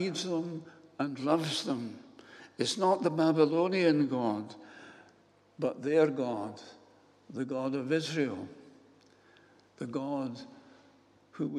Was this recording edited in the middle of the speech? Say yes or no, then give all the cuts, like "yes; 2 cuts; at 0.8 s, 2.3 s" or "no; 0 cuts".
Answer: no; 0 cuts